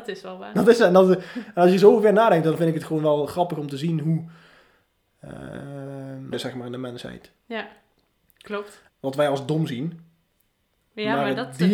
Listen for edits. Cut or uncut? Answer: cut